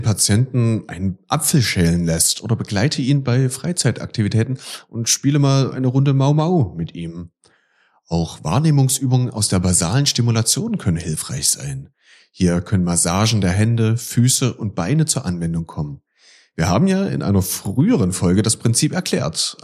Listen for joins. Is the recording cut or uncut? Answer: uncut